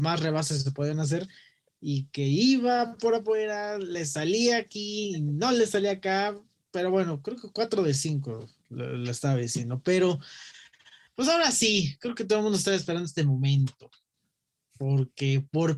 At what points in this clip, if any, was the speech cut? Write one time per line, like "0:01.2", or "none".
none